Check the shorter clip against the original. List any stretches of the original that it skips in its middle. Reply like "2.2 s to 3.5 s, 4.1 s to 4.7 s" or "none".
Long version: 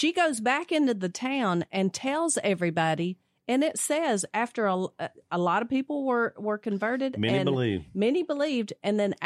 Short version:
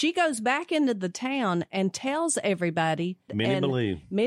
3.3 s to 7.1 s